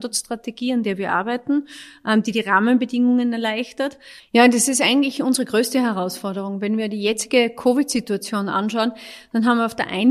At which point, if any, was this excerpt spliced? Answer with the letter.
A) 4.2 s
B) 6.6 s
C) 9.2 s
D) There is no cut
A